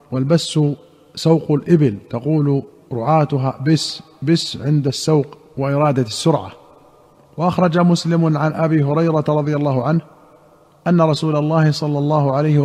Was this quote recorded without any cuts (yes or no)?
yes